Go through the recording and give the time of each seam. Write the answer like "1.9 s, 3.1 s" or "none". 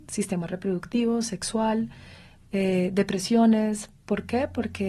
none